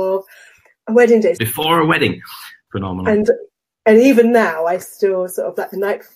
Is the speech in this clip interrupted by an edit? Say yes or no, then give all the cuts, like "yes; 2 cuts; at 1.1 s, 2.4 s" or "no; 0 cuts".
yes; 2 cuts; at 1.4 s, 2.7 s